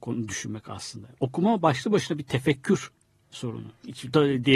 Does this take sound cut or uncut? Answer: uncut